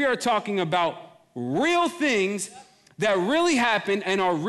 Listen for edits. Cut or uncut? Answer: uncut